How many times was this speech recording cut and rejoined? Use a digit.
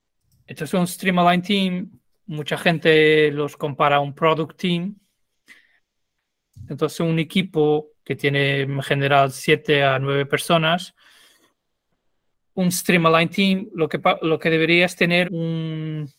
2